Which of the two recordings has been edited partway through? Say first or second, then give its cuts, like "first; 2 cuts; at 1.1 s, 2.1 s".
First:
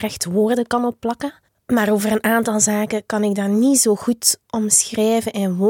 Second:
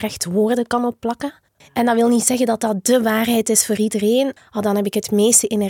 second; 2 cuts; at 1.6 s, 4.4 s